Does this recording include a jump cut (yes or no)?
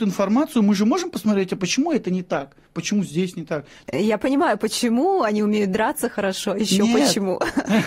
yes